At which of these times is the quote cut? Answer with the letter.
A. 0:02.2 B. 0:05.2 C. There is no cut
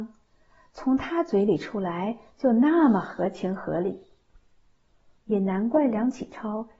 B